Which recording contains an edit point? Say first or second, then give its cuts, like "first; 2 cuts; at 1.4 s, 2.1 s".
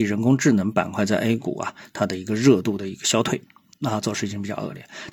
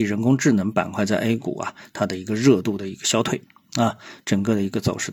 first; 1 cut; at 3.7 s